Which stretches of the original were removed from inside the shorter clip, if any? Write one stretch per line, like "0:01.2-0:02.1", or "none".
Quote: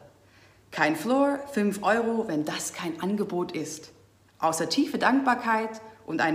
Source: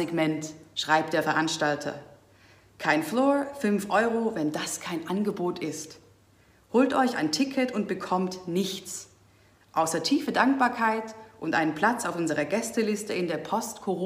0:06.4-0:09.6